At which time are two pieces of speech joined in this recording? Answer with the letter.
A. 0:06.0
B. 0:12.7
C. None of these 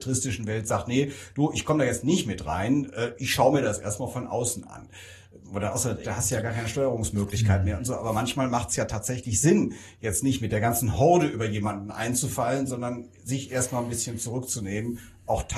A